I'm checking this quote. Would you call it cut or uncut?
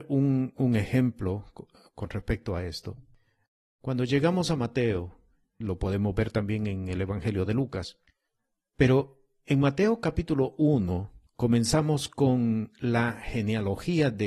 cut